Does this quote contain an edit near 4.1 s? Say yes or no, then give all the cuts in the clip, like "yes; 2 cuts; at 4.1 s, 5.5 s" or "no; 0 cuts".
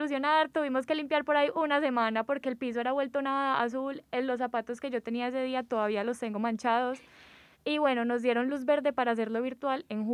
no; 1 cut; at 7.5 s